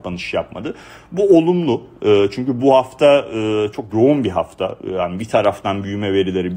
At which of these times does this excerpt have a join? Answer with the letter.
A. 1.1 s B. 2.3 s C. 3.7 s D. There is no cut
C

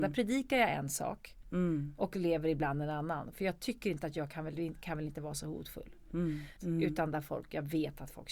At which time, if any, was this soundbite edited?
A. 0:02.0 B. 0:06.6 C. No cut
B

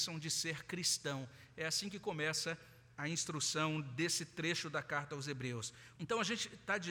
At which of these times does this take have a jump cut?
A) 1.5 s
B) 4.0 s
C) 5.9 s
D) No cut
C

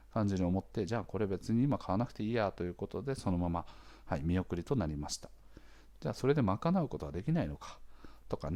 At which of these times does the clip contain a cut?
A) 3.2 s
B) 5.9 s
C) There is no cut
B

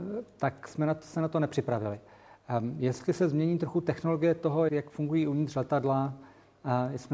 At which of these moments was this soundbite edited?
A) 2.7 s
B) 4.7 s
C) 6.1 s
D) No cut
B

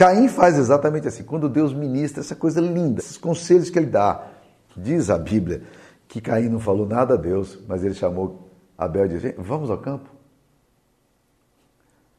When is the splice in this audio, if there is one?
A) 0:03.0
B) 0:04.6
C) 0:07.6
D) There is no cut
A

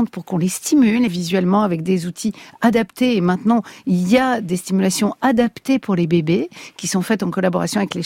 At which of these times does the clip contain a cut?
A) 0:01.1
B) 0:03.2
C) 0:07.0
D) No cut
A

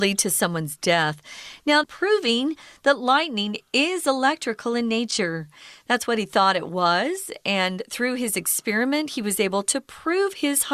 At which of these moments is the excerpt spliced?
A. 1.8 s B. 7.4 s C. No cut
A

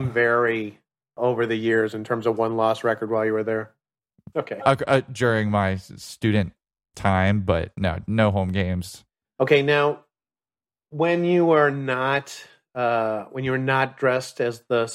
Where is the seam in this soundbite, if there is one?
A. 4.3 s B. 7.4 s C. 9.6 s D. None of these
A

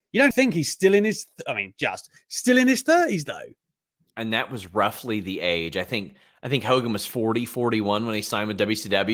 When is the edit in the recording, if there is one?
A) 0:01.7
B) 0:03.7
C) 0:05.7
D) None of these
D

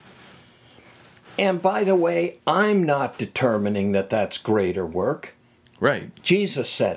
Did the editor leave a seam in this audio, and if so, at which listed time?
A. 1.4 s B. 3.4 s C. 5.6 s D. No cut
C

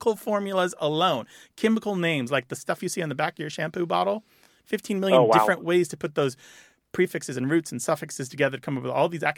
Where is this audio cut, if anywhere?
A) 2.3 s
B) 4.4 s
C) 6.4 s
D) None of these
D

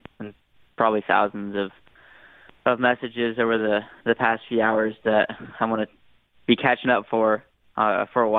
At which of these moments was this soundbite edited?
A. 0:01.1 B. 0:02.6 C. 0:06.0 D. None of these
D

